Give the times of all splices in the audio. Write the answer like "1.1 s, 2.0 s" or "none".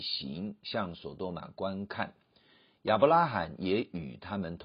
none